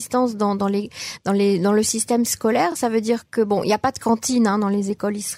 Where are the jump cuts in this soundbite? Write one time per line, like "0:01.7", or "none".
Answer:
none